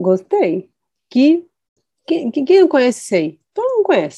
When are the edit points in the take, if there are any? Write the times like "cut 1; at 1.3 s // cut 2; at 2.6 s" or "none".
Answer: cut 1; at 0.9 s